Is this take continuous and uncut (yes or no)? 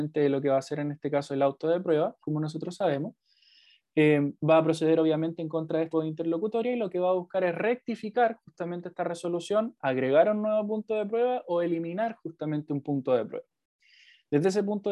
no